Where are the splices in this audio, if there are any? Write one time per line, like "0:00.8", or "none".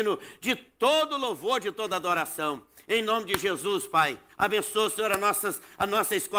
0:04.3

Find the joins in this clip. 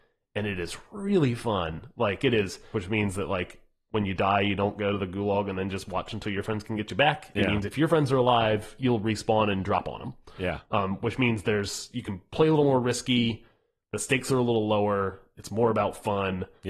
0:02.7

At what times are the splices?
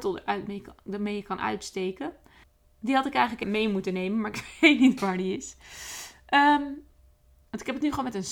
0:03.4

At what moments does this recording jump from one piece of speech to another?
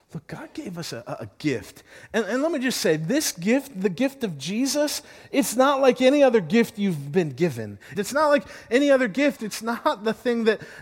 0:08.0
0:09.4

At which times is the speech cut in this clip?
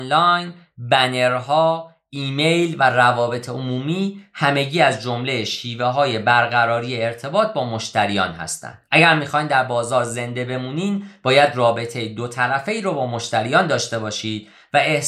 0:08.9

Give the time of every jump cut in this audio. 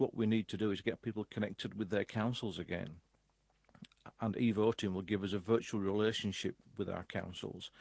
none

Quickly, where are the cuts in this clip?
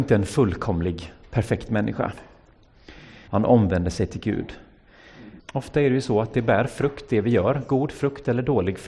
0:03.3
0:05.4

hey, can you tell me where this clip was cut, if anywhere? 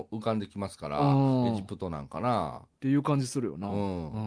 0:02.7

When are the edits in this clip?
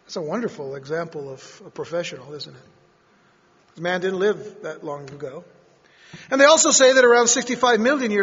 0:03.6

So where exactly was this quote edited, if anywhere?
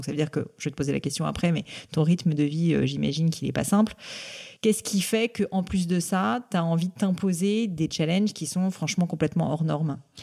none

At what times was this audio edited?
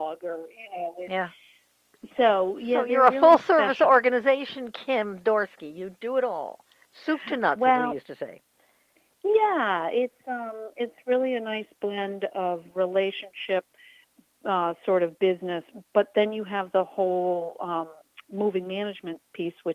none

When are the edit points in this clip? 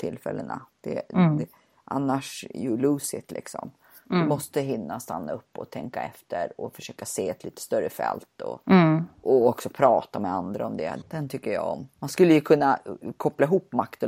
0:09.2
0:11.0

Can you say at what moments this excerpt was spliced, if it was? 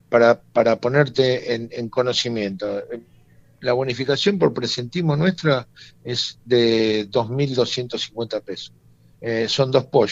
0:09.1

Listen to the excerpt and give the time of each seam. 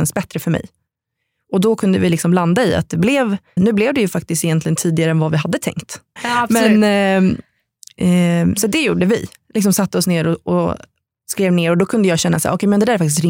0:03.6
0:06.2

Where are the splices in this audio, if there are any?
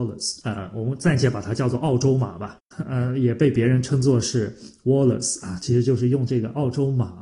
0:02.7

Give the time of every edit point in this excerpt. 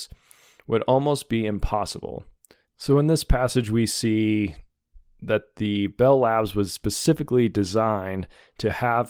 0:02.6

